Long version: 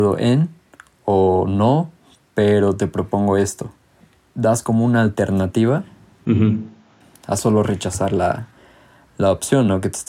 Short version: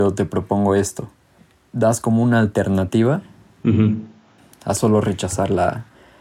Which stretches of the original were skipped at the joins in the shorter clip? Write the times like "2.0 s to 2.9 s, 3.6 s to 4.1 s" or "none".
none